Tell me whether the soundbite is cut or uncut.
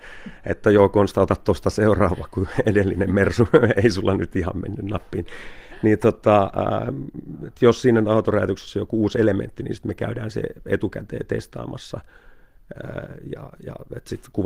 uncut